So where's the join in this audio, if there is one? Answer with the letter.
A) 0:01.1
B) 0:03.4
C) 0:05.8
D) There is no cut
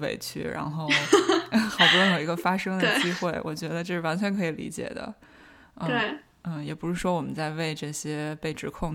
D